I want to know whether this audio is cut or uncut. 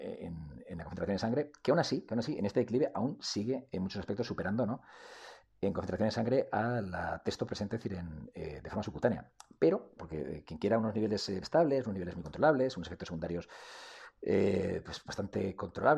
cut